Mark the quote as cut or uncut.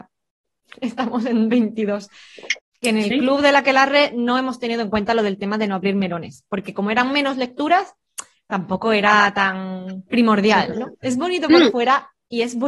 cut